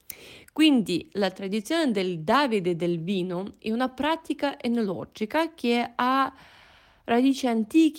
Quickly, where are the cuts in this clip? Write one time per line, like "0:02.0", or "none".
none

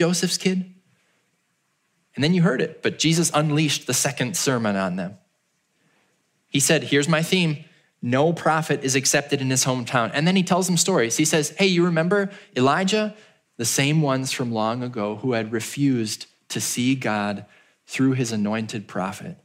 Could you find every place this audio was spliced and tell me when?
0:13.5

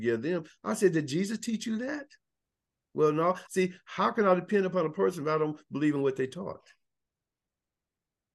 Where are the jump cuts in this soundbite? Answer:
0:03.5

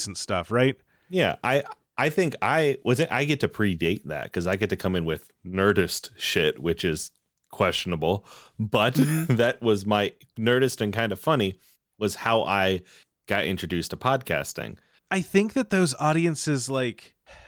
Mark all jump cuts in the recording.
0:15.0

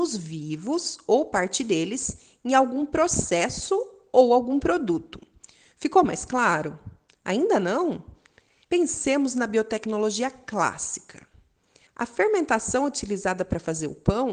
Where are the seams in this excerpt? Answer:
0:08.6
0:11.9

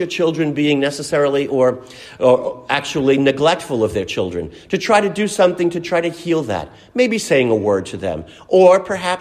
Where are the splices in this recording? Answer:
none

